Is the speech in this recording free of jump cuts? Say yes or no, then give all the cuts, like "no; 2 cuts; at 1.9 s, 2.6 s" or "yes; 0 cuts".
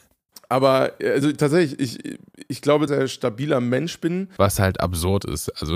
no; 2 cuts; at 2.9 s, 4.4 s